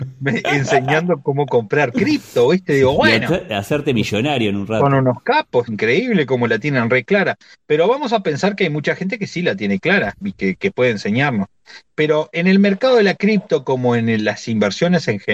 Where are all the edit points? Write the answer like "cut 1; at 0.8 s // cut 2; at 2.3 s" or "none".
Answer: cut 1; at 5.7 s